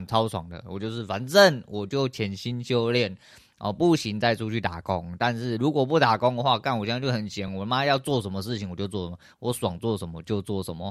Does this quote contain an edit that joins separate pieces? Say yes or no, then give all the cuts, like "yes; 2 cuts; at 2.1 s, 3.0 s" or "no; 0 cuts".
no; 0 cuts